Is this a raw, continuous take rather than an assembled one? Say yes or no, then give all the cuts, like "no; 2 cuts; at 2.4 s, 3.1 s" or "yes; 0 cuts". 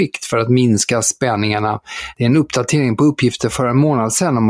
no; 1 cut; at 2.1 s